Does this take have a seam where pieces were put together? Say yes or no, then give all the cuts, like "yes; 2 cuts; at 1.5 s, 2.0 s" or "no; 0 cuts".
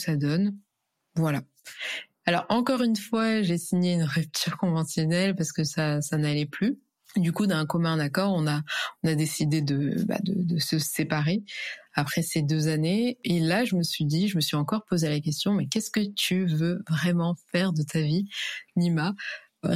yes; 1 cut; at 2.2 s